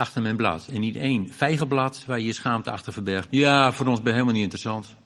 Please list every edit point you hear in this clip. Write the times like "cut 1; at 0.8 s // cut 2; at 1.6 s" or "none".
cut 1; at 3.3 s